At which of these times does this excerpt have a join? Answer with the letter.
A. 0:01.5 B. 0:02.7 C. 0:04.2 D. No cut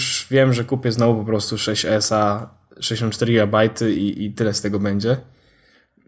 D